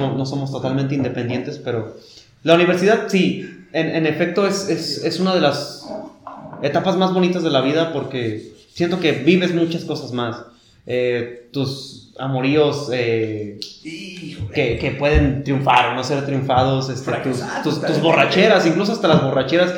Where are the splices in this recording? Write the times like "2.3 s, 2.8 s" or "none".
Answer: none